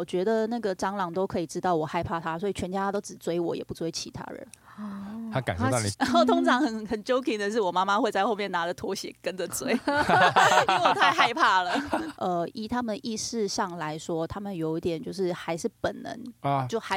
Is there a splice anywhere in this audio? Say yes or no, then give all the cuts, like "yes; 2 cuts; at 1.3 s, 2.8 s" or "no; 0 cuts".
yes; 2 cuts; at 5.9 s, 12.1 s